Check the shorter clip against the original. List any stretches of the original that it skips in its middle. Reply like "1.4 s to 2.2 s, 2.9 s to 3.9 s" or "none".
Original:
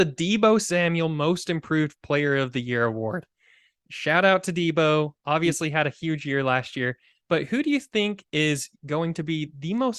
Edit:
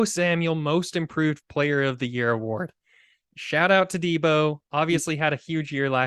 none